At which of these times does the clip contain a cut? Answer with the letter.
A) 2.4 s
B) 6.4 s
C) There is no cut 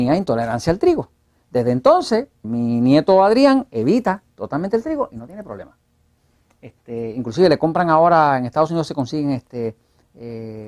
A